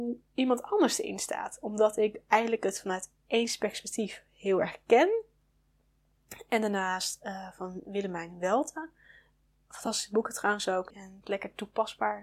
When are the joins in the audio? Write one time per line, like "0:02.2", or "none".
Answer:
0:10.9